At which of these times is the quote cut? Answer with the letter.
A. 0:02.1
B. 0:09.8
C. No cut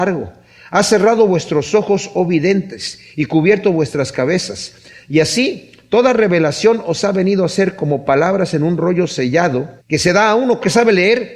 B